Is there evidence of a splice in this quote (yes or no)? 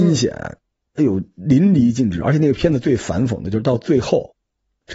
no